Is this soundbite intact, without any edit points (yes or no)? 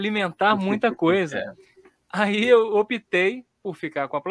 yes